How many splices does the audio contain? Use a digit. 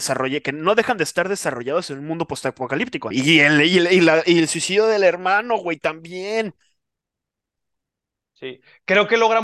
1